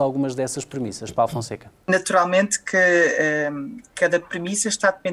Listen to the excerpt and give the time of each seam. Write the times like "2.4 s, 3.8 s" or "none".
1.8 s